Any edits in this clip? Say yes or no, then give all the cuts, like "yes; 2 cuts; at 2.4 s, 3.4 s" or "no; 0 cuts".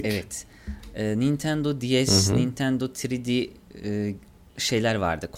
no; 0 cuts